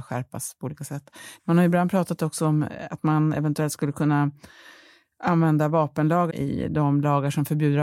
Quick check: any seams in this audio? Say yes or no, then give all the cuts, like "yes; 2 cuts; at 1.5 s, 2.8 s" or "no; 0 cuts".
yes; 2 cuts; at 1.4 s, 6.3 s